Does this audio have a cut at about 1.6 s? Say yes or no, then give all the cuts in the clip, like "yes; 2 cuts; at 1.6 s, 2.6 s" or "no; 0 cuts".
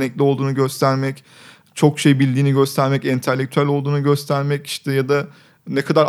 no; 0 cuts